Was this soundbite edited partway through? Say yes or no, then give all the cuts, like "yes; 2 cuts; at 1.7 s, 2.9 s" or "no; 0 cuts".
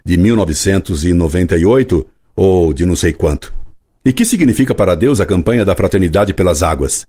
no; 0 cuts